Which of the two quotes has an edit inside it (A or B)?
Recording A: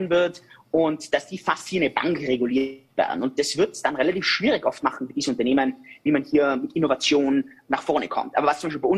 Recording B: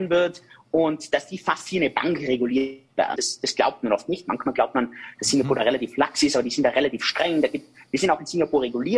B